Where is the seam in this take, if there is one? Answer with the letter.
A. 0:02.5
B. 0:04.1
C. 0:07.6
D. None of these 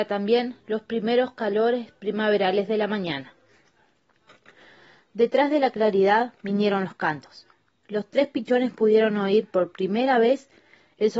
D